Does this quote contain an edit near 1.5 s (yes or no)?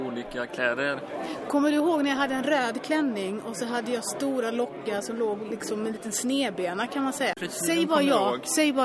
no